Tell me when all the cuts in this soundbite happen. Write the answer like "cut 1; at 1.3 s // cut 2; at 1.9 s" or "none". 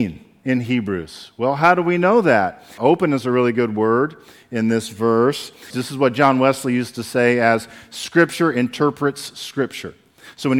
cut 1; at 2.8 s // cut 2; at 5.7 s